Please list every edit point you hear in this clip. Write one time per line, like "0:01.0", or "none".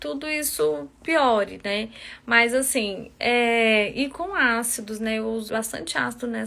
0:05.5